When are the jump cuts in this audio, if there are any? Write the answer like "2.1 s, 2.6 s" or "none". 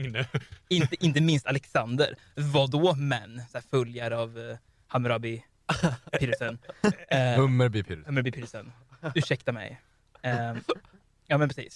none

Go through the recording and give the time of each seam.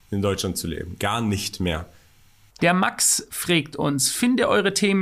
2.5 s

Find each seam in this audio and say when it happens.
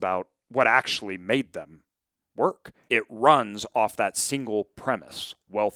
2.9 s

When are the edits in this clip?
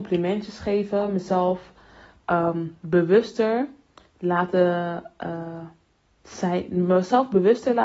none

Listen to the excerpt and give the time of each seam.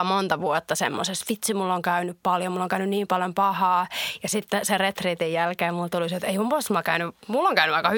none

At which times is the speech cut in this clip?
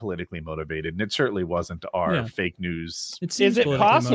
none

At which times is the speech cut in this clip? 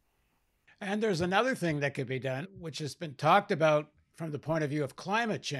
2.4 s

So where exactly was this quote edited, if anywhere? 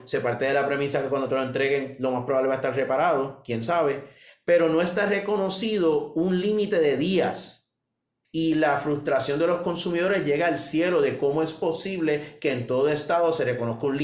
8.2 s

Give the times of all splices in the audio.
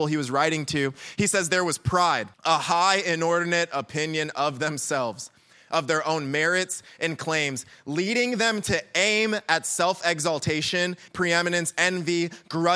2.3 s, 11.1 s

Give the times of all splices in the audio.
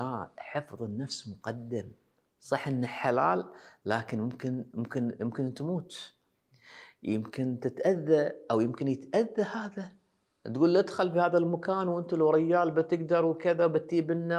none

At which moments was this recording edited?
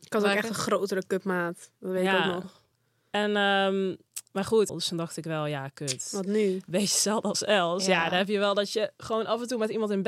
4.7 s

